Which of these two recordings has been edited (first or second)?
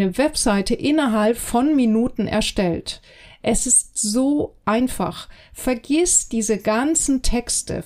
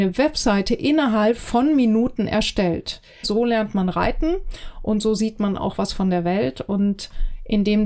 second